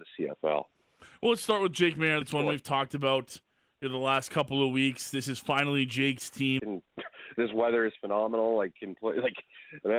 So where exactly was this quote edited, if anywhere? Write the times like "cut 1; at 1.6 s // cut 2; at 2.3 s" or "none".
cut 1; at 2.2 s // cut 2; at 6.6 s